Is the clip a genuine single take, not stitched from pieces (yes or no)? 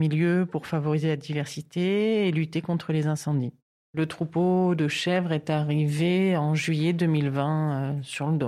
no